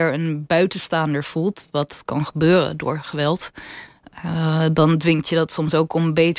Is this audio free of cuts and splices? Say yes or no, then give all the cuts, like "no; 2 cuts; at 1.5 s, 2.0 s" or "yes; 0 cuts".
yes; 0 cuts